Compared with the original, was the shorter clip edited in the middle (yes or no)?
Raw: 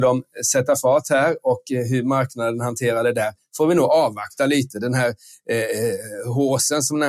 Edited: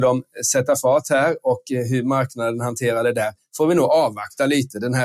no